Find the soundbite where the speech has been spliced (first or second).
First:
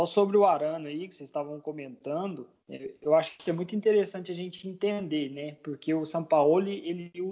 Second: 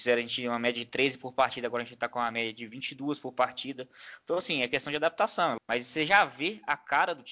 second